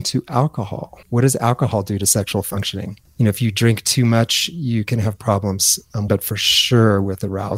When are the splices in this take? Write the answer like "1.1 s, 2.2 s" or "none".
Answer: 1.0 s, 3.1 s, 6.1 s